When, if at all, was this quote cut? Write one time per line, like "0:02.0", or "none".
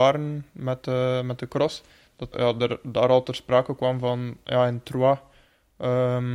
0:02.3